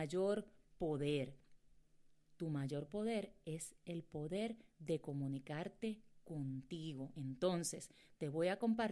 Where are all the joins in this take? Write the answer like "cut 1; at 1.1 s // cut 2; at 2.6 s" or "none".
none